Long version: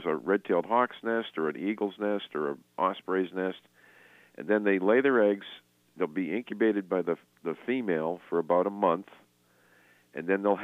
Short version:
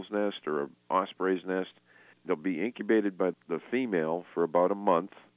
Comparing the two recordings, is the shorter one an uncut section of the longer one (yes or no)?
no